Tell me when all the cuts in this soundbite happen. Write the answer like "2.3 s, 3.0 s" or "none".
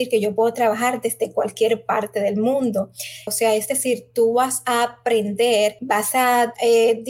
3.3 s, 5.8 s